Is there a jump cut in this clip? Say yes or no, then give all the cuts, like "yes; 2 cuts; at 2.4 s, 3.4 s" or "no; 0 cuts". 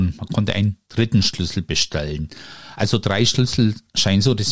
no; 0 cuts